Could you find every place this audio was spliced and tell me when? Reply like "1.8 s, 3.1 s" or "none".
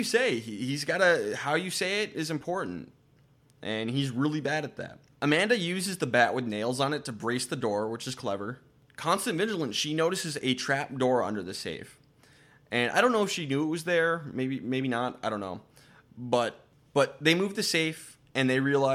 none

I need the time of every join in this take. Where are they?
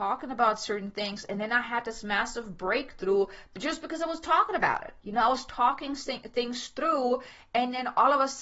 none

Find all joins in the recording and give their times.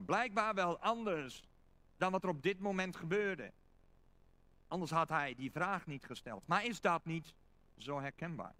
none

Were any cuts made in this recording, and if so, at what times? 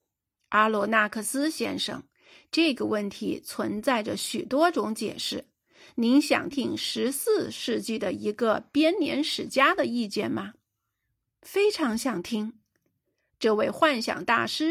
6.5 s

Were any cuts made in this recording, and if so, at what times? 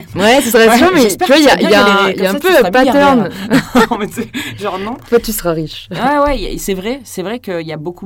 none

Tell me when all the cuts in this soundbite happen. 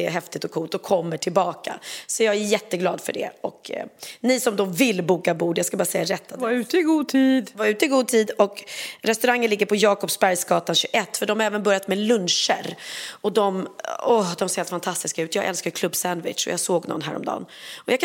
none

